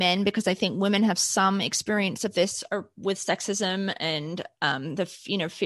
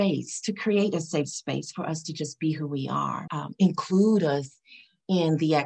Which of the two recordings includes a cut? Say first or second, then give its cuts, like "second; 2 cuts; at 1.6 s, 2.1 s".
second; 1 cut; at 3.3 s